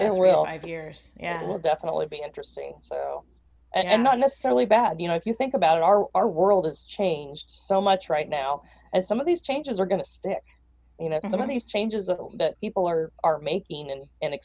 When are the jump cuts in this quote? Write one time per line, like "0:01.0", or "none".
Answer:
none